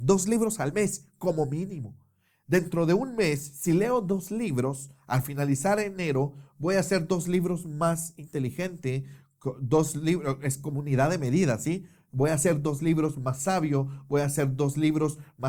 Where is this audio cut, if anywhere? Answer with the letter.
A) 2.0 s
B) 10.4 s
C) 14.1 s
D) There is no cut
D